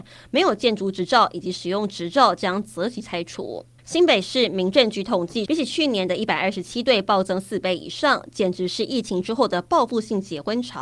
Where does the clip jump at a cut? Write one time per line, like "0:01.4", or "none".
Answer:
0:03.8
0:05.5